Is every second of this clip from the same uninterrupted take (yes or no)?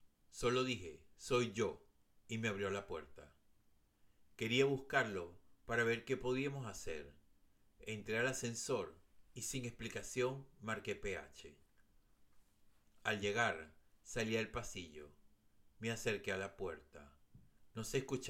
yes